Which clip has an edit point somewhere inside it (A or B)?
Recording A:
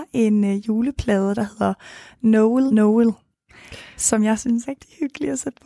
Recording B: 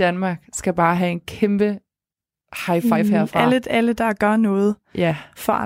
A